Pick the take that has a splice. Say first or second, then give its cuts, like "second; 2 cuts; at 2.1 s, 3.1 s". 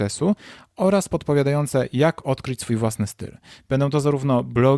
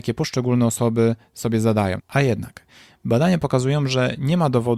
second; 1 cut; at 2.0 s